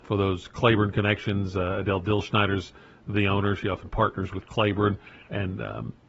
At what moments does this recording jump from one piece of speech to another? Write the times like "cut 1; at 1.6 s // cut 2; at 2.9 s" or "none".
none